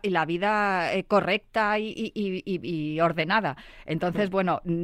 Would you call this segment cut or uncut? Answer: uncut